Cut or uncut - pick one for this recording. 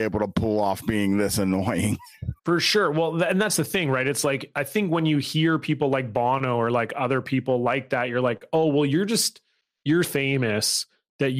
cut